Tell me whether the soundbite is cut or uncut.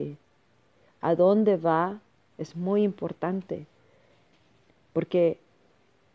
cut